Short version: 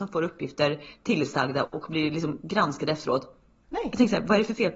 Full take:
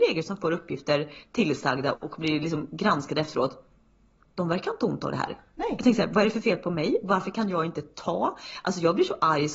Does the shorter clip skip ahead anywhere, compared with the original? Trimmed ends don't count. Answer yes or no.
yes